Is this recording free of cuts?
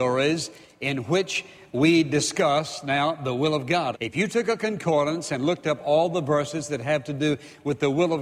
no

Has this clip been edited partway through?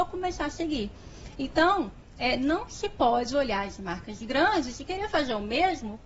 no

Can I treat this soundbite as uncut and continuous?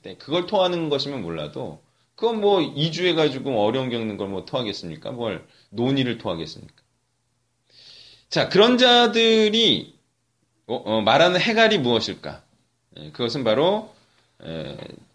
yes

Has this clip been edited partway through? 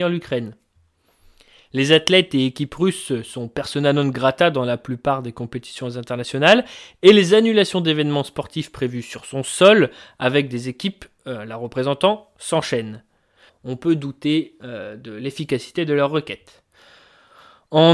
yes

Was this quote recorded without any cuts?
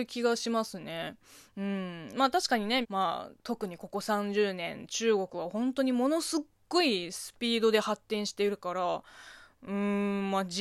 no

